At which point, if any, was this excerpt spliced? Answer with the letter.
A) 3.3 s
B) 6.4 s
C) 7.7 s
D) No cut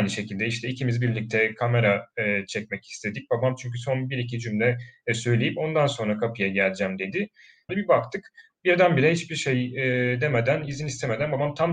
C